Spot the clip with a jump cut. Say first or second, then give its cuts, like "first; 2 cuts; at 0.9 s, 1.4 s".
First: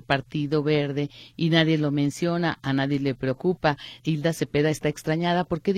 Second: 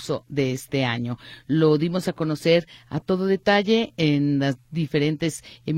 first; 1 cut; at 4.0 s